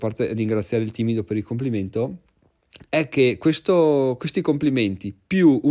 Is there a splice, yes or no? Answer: no